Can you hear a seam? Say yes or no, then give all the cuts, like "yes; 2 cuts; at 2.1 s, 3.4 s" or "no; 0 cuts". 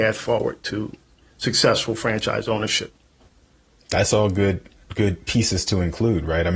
no; 0 cuts